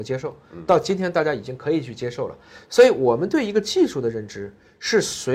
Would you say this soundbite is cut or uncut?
uncut